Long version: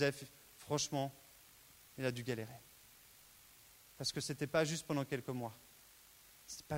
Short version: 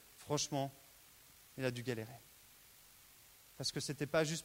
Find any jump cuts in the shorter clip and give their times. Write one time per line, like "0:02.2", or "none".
none